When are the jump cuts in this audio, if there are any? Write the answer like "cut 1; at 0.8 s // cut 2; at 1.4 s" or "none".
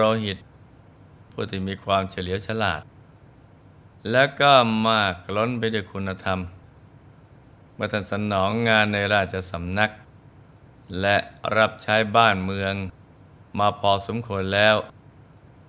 none